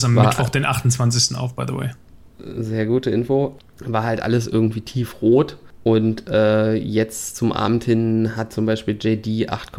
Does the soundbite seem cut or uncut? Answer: uncut